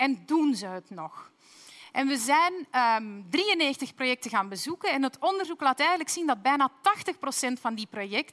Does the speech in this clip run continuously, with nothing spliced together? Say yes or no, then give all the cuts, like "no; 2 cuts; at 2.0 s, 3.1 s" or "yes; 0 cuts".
yes; 0 cuts